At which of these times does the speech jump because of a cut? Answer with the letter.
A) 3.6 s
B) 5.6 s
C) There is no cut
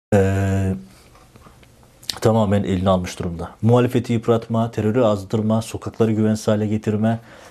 C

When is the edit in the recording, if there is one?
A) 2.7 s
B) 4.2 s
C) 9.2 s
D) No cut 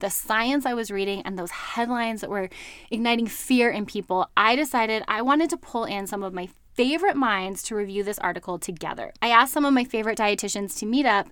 D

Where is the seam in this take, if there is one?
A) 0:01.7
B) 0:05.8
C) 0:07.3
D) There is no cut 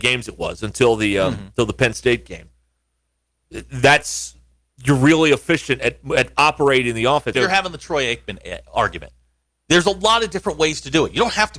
C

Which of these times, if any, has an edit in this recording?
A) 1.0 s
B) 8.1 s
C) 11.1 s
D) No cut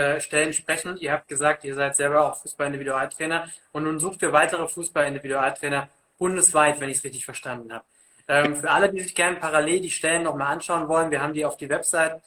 D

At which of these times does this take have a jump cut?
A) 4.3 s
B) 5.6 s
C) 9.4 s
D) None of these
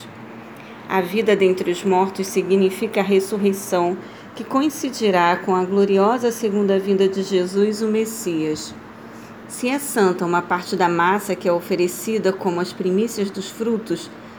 C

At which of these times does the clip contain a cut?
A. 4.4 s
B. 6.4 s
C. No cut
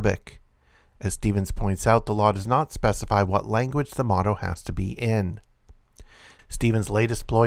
B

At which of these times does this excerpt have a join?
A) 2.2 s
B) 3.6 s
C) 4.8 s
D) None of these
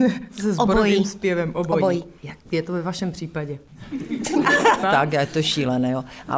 C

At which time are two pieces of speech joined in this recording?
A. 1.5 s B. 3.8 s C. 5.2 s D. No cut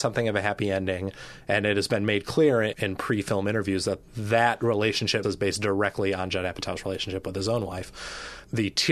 C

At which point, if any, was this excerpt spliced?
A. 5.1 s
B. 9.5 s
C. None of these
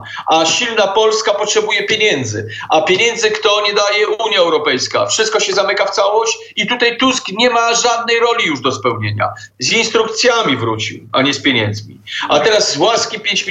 B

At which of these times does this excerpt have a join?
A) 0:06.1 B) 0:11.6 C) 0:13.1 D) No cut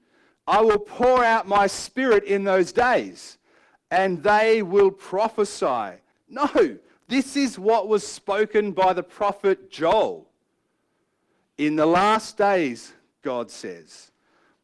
A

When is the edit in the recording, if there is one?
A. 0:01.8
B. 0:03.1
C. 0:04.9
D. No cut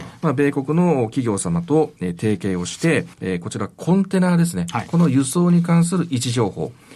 B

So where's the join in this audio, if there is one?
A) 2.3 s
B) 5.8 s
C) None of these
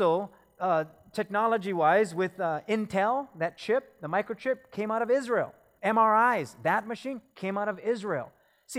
B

